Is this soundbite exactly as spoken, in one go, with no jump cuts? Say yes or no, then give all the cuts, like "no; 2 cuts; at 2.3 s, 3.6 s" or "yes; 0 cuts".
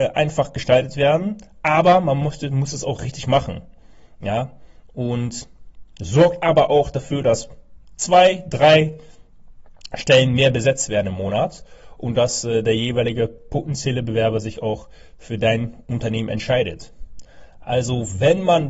yes; 0 cuts